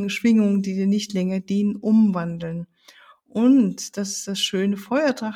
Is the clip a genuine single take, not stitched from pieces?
yes; 0 cuts

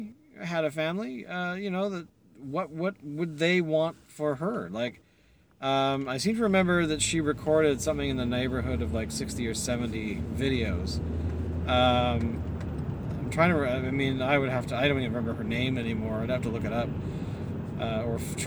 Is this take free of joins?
yes; 0 cuts

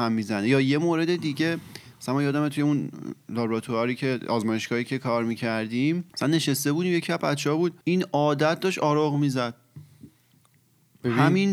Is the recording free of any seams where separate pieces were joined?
no; 2 cuts; at 6.1 s, 7.8 s

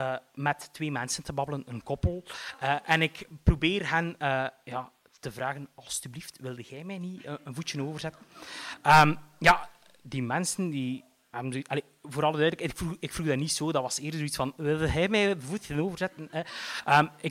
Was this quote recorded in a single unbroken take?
yes; 0 cuts

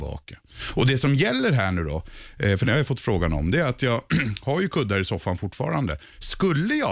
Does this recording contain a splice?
no; 0 cuts

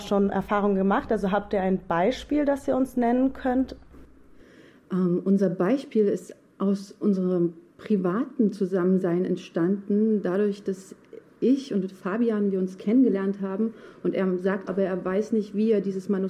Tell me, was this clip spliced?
yes; 1 cut; at 14.7 s

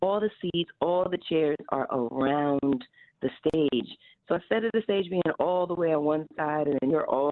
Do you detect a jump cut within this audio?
no; 0 cuts

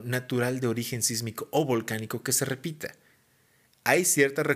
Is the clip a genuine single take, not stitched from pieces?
yes; 0 cuts

